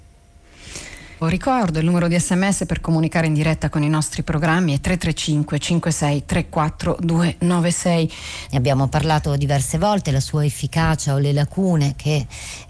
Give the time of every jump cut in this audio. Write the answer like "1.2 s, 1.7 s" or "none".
1.2 s, 8.5 s